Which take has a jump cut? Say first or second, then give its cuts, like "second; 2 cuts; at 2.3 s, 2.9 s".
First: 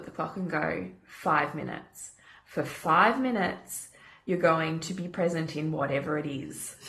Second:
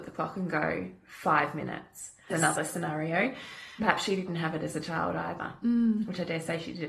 second; 2 cuts; at 2.3 s, 3.8 s